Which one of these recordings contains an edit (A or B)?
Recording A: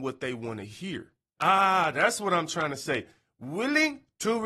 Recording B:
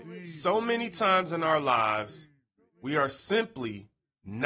A